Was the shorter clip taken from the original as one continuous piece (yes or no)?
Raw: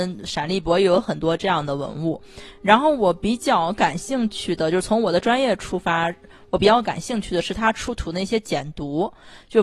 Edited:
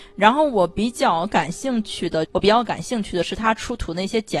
no